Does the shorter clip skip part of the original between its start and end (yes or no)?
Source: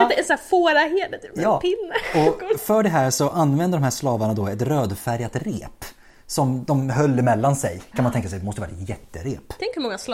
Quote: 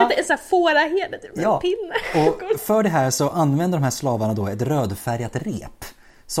no